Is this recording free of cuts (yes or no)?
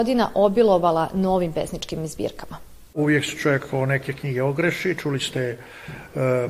yes